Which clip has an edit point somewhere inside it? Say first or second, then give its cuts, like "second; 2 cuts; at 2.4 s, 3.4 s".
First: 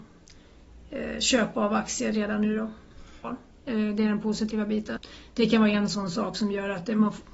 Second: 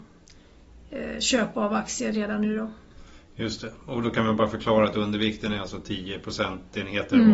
first; 2 cuts; at 3.2 s, 5.0 s